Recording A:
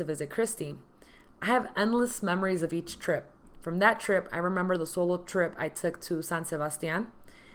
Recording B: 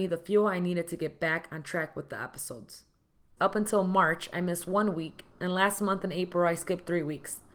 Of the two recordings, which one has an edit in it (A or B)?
B